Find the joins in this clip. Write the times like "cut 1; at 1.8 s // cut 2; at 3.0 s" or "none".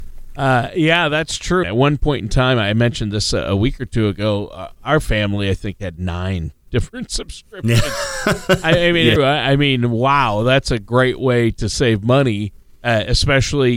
cut 1; at 1.6 s // cut 2; at 9.2 s